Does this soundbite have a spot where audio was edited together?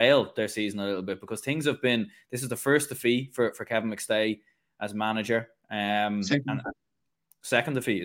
no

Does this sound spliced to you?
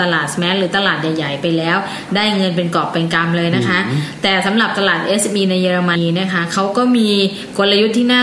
yes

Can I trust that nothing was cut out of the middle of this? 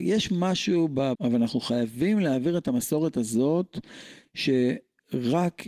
no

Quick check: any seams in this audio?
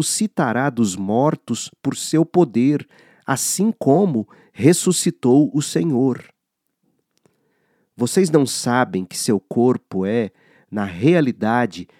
no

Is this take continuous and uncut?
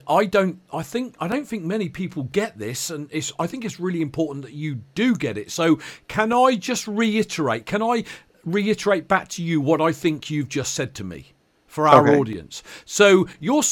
yes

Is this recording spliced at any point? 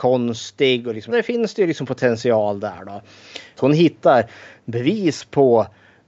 yes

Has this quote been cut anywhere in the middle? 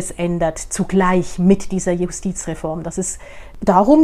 no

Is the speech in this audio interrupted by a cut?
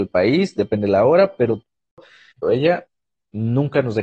yes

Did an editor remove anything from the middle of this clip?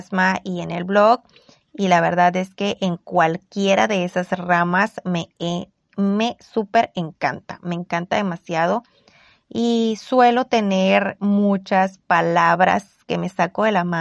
no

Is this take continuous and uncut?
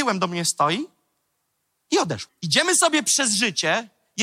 no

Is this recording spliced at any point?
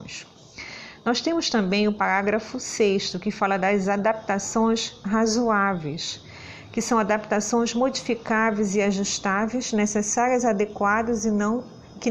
no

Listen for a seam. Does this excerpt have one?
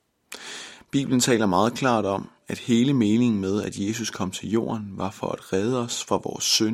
no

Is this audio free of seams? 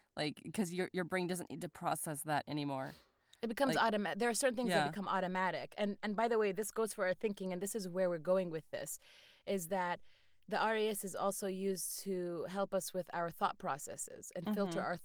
yes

